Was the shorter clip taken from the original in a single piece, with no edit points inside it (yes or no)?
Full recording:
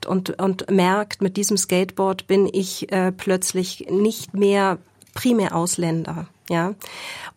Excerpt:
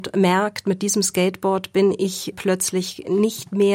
no